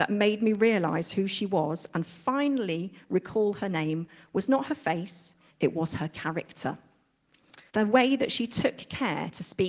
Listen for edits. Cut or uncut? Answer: cut